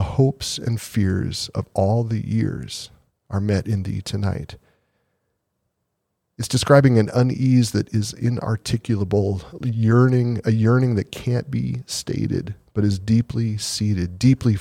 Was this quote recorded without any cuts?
yes; 0 cuts

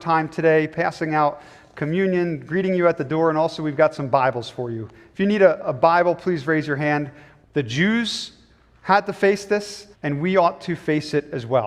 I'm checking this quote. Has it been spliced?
yes; 2 cuts; at 7.4 s, 9.9 s

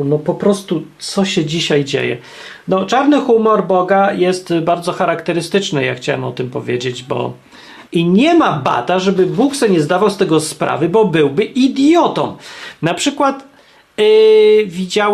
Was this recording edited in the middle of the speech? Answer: yes; 1 cut; at 7.9 s

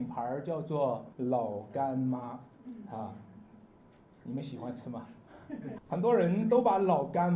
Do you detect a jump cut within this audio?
yes; 2 cuts; at 1.1 s, 5.8 s

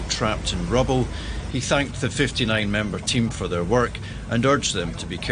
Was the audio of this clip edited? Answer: no; 0 cuts

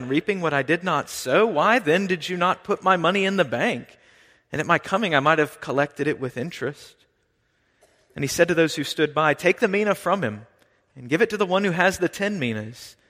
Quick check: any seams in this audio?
no; 0 cuts

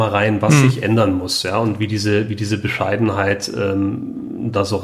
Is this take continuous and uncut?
yes; 0 cuts

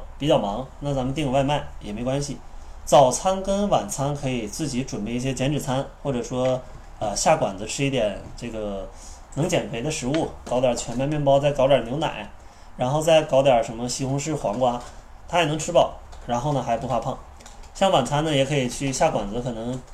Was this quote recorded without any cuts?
no; 2 cuts; at 10.5 s, 15.2 s

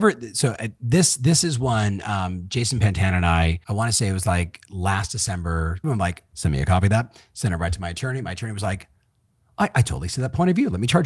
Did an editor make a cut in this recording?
yes; 2 cuts; at 3.6 s, 5.8 s

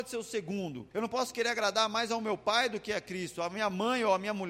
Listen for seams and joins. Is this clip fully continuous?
no; 1 cut; at 0.9 s

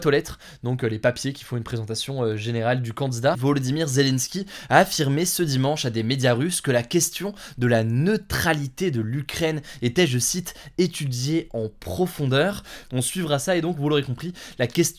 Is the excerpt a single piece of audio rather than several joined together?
no; 2 cuts; at 3.3 s, 12.8 s

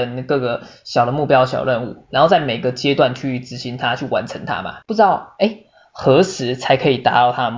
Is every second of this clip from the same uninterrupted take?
no; 1 cut; at 4.8 s

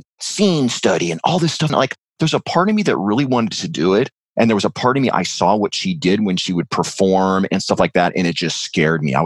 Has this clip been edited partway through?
yes; 1 cut; at 1.7 s

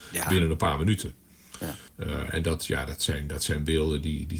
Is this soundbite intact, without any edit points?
no; 1 cut; at 1.9 s

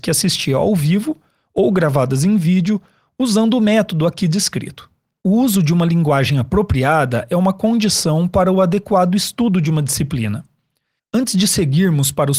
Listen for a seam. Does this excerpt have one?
yes; 2 cuts; at 5.2 s, 11.0 s

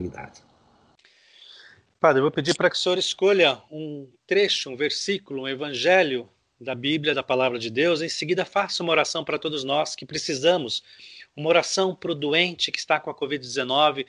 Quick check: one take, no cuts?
no; 1 cut; at 3.7 s

